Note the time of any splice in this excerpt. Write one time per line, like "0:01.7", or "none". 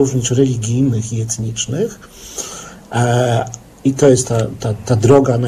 none

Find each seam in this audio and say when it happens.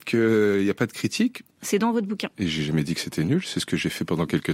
0:01.5

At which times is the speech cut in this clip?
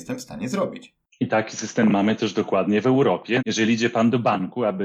0:03.4

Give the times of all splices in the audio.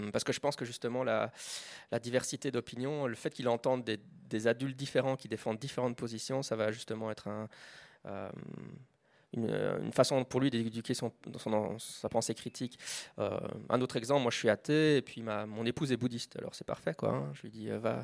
none

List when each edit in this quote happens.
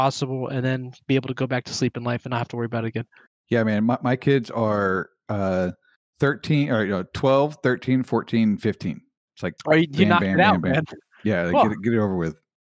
none

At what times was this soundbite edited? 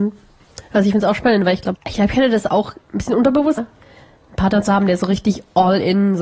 0:01.7
0:03.6

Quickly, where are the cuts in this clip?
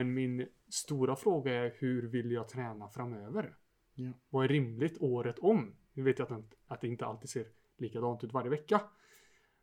none

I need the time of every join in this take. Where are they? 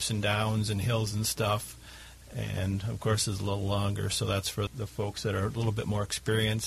0:04.7

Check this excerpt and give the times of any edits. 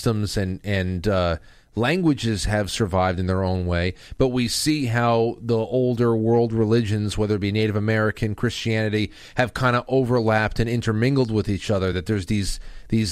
none

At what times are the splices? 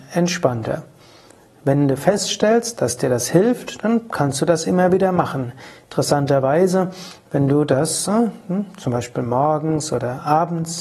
none

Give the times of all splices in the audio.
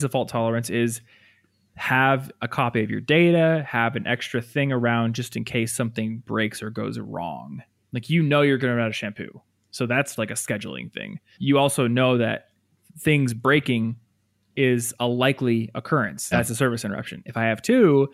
0:10.2
0:11.3
0:16.3

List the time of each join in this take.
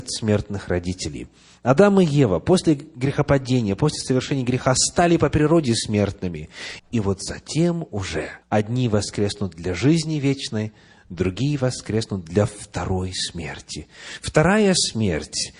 0:06.8
0:08.4

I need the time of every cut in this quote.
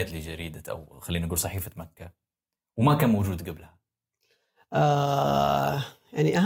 none

